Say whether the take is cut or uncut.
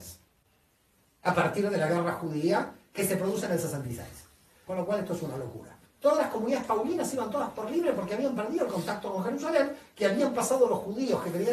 cut